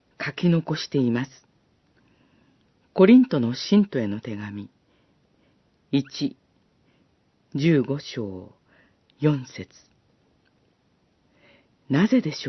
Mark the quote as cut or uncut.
uncut